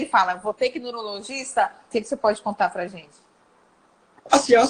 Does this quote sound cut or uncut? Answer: cut